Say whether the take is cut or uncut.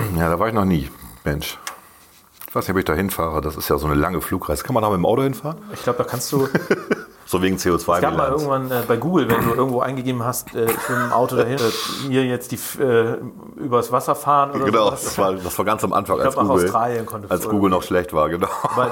cut